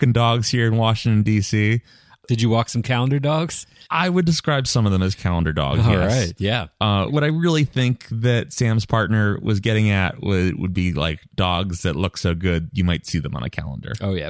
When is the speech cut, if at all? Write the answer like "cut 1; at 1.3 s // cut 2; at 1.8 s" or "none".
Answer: cut 1; at 7.1 s